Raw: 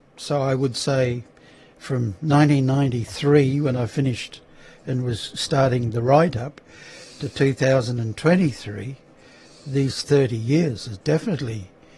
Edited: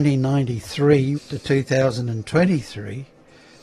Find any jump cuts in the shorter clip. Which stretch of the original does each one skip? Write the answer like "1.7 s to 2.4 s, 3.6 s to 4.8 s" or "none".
3.6 s to 7.1 s